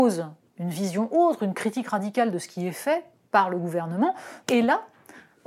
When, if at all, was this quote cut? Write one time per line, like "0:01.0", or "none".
0:04.4